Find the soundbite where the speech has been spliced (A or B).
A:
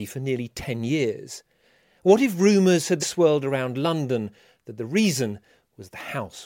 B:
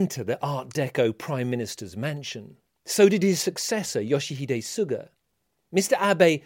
A